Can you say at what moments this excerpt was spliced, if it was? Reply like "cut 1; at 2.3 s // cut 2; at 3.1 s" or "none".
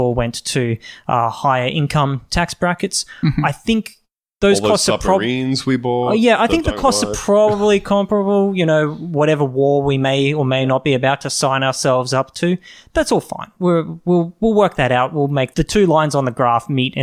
cut 1; at 15.5 s